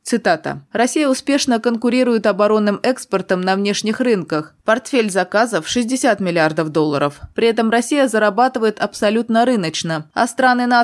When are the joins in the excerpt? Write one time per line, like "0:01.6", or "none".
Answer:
0:04.6
0:07.3